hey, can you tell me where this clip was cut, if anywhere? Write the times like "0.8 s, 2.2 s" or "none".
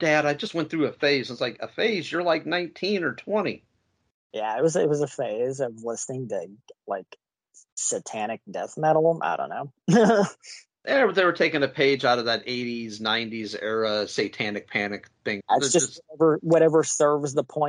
15.4 s

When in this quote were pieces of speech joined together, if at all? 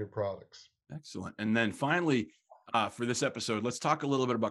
none

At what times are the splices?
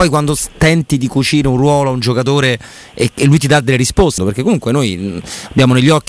4.2 s

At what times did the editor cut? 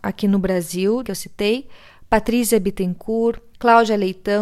1.0 s

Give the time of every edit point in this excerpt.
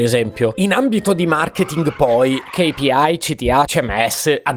3.7 s

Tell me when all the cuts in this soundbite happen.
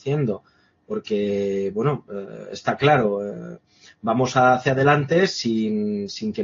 none

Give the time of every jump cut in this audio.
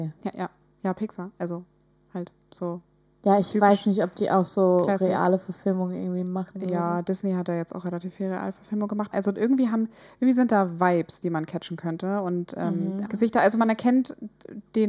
9.1 s, 13.1 s

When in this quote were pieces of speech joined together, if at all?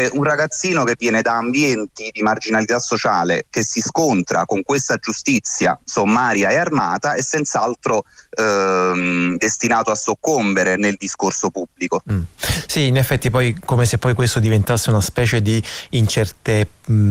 10.8 s

